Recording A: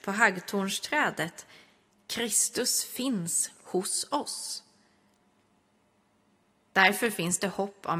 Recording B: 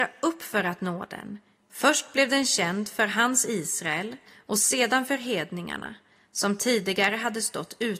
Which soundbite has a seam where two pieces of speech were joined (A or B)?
B